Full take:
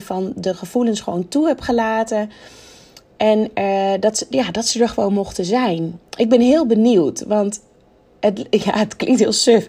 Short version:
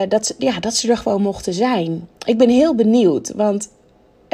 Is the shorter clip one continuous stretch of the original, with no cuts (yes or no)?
yes